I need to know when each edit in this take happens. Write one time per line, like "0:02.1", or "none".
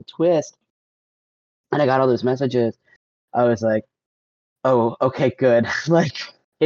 none